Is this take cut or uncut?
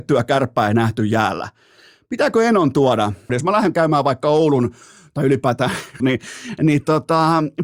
cut